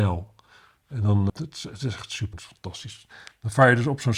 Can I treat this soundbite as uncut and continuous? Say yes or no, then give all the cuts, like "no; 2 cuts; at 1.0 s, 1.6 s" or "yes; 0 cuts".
no; 2 cuts; at 1.3 s, 2.3 s